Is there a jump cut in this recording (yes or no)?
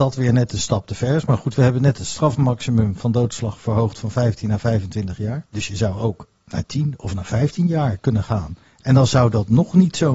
yes